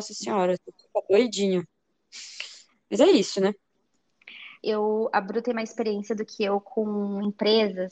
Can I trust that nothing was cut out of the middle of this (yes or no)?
no